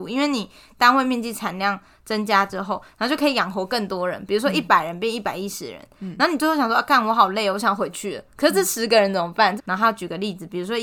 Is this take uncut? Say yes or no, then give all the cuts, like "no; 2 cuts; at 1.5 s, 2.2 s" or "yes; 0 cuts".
no; 1 cut; at 9.6 s